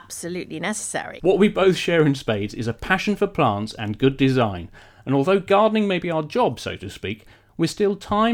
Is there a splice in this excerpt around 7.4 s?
no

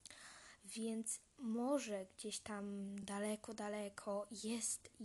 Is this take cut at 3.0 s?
no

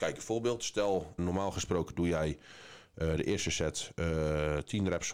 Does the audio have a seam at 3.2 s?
no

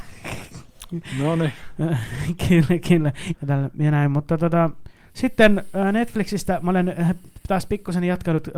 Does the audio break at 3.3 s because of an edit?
yes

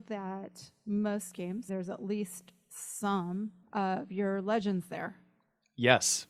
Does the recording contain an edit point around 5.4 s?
no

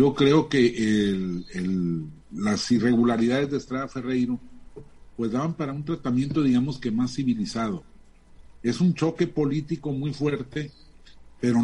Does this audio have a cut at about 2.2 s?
yes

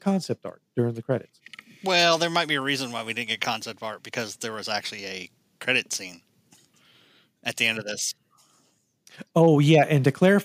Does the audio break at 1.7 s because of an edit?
no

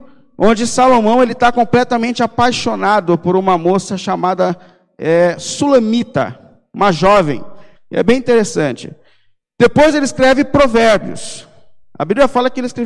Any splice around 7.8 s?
yes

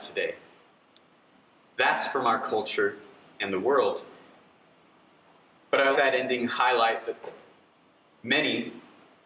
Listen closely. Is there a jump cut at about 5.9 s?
yes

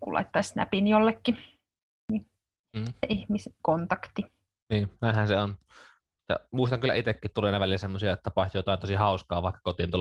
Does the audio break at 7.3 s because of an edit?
no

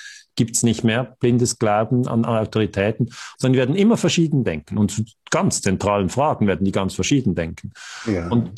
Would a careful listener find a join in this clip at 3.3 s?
yes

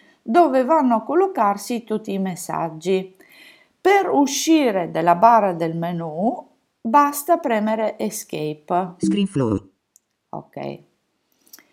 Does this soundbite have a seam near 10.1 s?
no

